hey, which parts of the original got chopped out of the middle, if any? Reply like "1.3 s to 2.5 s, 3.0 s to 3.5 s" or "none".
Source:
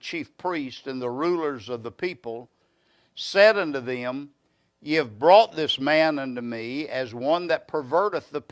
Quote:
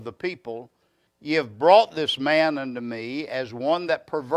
2.9 s to 4.7 s